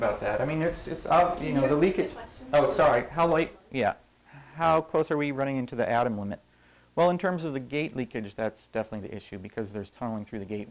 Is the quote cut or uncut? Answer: uncut